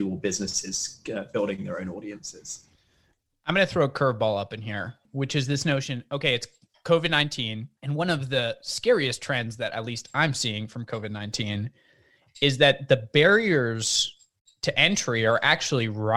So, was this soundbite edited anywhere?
no; 0 cuts

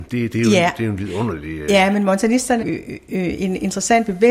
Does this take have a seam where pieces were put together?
yes; 1 cut; at 2.6 s

